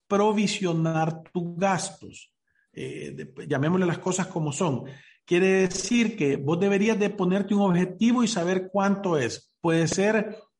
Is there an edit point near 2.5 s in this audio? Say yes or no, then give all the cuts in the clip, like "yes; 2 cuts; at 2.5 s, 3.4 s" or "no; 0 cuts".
no; 0 cuts